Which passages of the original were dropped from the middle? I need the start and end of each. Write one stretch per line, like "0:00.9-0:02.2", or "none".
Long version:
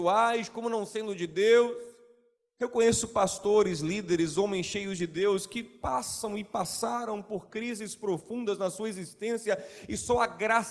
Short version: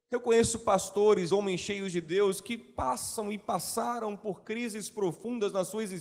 0:03.8-0:04.4